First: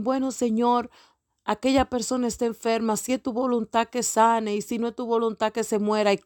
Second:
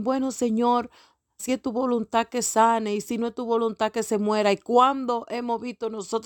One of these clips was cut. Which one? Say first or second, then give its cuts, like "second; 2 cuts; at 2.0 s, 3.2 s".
second; 1 cut; at 1.4 s